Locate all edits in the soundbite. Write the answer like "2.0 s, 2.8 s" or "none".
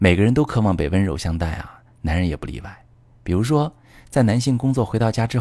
none